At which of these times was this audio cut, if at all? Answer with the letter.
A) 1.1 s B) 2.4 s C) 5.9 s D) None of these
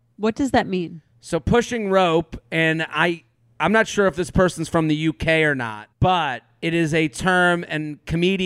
C